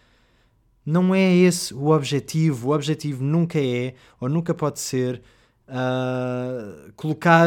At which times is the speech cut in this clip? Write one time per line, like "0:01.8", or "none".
none